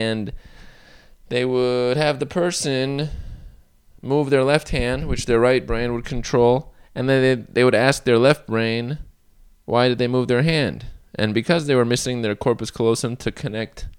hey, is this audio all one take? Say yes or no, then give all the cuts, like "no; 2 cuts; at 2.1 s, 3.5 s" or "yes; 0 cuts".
yes; 0 cuts